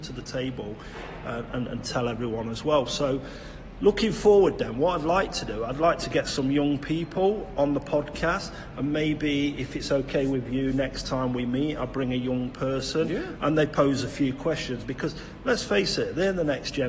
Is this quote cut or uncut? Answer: uncut